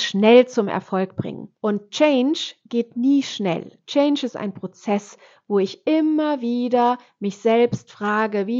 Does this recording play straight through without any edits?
no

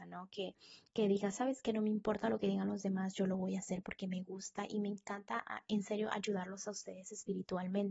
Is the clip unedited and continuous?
yes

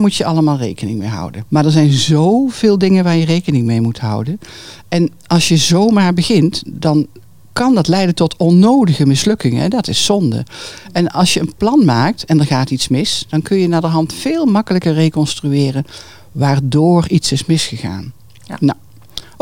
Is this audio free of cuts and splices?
no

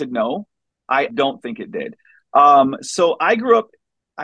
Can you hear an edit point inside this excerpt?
yes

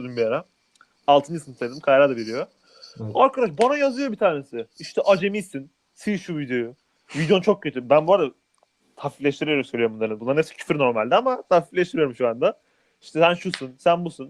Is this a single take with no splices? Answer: yes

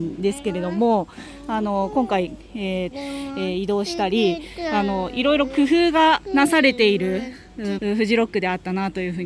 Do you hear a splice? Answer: yes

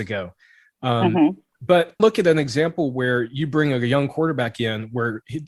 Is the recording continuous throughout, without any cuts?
no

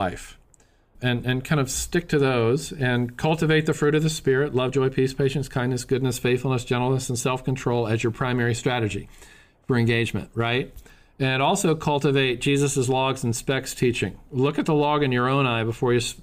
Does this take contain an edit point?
no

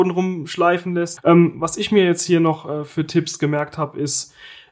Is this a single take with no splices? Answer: no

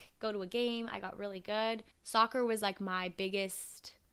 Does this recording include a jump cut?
yes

